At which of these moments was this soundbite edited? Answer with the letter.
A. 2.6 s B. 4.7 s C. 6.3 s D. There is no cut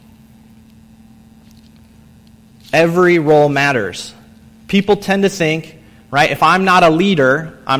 B